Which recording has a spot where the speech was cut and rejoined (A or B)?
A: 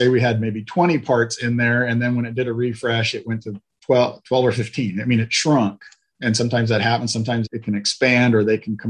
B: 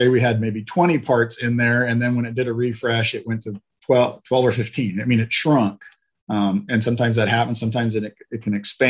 A